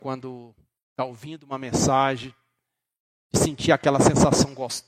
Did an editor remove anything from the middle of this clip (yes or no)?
no